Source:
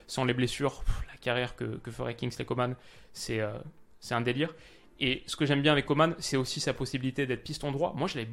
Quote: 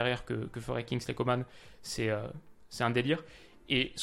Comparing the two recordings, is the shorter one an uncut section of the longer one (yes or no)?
yes